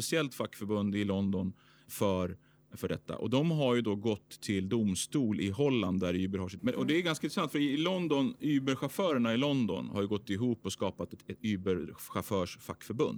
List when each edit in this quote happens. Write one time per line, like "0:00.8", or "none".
0:06.6